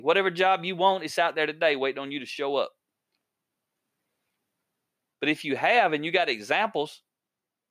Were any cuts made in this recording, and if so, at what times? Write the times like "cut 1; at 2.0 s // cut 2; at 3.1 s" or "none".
cut 1; at 5.1 s